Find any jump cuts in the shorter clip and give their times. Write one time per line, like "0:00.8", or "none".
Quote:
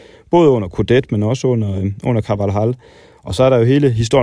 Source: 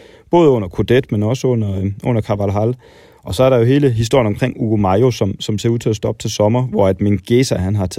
none